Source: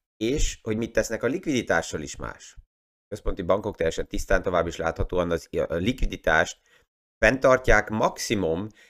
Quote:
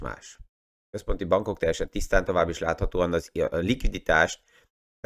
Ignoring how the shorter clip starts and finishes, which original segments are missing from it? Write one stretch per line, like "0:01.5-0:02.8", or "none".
none